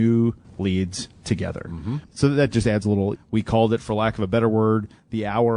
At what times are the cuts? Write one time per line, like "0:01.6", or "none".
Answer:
0:02.0
0:03.2

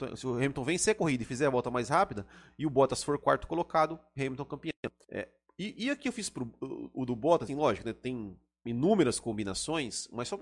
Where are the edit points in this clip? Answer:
0:05.0
0:07.5

